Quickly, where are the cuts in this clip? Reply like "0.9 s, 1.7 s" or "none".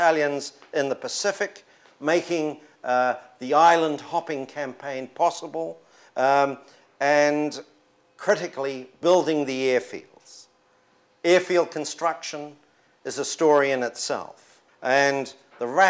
14.7 s